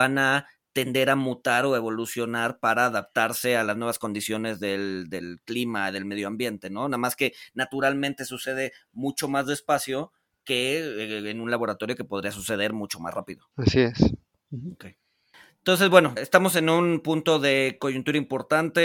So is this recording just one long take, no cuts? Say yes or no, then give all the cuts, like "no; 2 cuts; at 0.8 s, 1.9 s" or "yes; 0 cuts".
no; 2 cuts; at 13.5 s, 16.2 s